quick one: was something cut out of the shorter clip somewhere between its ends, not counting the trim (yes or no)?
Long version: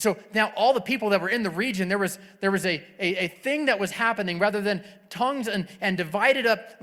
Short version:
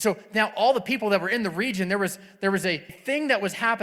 yes